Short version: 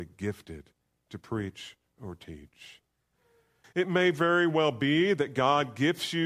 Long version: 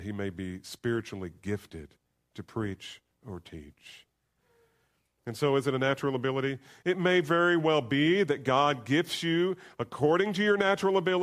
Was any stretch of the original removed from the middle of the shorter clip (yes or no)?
yes